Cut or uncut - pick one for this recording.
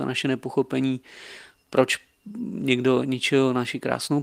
uncut